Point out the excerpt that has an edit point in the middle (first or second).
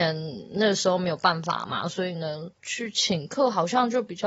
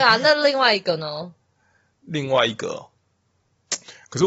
first